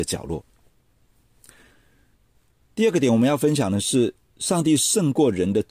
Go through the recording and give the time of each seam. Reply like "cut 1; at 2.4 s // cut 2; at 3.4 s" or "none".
none